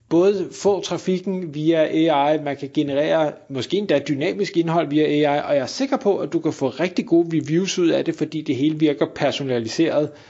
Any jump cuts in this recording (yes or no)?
no